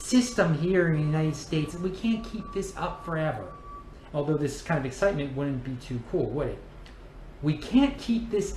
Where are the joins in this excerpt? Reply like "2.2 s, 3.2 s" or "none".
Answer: 1.7 s, 4.1 s